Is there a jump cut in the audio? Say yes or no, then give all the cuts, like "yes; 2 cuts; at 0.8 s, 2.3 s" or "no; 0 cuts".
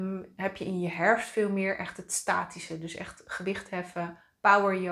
no; 0 cuts